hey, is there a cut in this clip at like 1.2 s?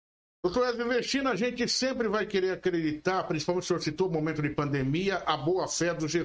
no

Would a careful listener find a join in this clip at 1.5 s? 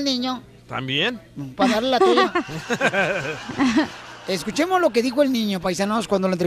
no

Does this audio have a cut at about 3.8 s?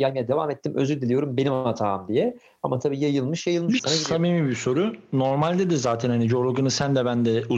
yes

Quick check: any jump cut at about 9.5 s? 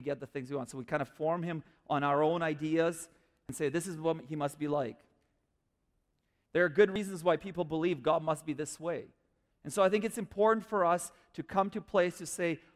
yes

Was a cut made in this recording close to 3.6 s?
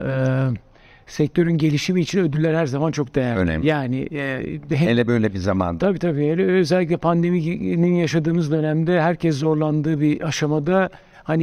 no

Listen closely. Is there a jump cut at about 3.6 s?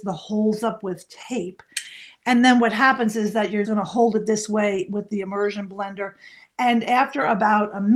yes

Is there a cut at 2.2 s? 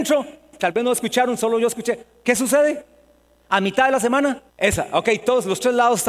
no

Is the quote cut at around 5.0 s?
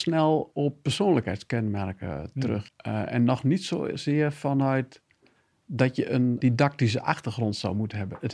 no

